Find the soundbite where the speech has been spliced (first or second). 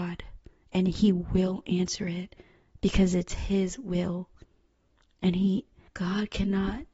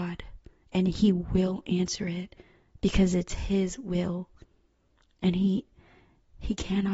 first